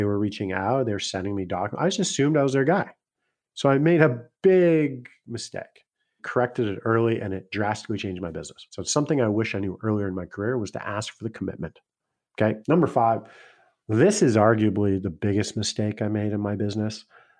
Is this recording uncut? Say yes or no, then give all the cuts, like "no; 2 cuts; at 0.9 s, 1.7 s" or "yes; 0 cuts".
yes; 0 cuts